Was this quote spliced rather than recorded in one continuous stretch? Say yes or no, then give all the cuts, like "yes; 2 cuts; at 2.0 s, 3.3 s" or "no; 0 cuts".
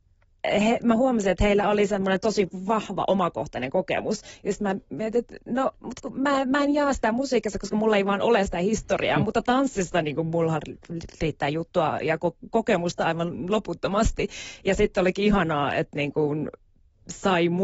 no; 0 cuts